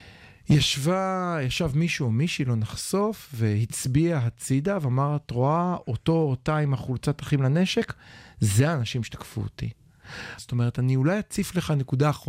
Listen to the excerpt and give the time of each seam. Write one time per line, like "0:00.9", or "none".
0:10.4